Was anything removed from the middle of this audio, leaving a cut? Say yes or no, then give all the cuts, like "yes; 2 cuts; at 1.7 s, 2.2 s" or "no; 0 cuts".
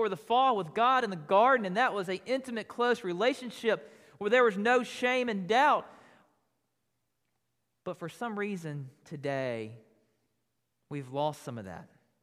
no; 0 cuts